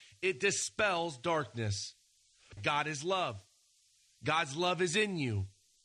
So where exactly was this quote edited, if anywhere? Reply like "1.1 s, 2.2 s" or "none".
2.6 s